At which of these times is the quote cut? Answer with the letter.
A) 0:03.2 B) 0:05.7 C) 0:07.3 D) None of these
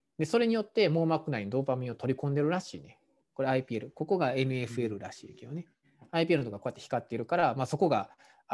A